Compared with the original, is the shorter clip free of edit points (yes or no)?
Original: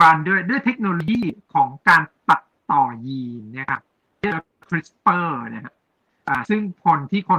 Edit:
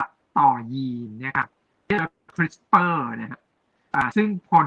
yes